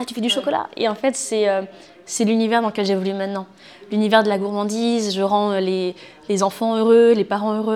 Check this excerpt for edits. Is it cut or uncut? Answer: uncut